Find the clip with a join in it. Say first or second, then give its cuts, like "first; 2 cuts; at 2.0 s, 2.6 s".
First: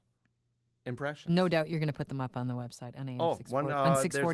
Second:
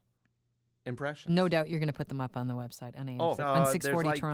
second; 1 cut; at 3.4 s